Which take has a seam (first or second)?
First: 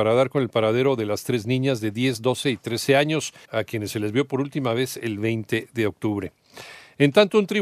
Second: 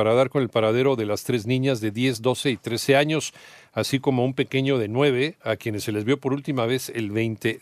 first